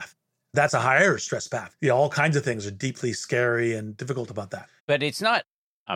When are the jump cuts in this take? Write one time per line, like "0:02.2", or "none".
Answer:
0:04.8